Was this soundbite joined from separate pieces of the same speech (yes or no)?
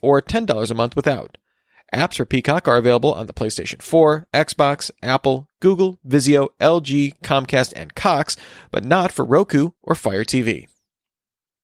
no